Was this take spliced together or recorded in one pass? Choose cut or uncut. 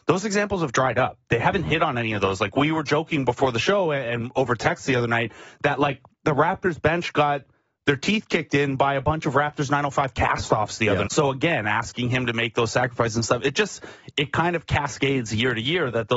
cut